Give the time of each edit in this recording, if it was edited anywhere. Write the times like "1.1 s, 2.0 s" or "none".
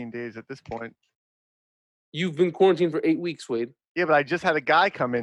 none